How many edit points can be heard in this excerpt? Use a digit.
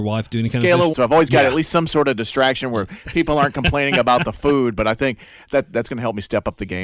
1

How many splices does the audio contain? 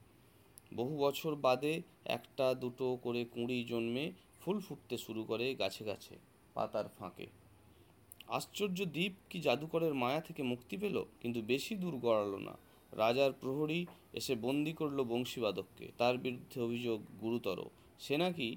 2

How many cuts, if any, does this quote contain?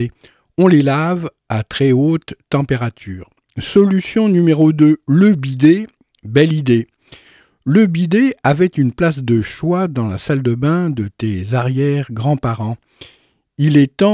0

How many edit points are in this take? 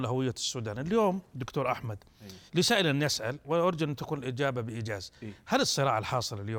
1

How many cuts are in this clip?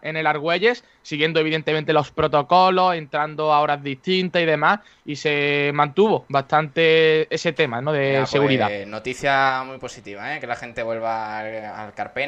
0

